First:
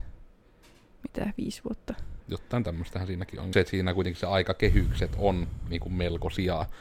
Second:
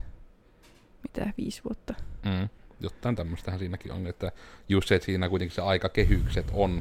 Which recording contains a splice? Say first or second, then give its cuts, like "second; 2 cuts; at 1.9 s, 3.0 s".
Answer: first; 2 cuts; at 2.2 s, 3.5 s